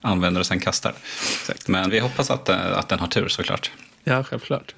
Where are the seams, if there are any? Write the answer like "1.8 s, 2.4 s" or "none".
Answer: 1.9 s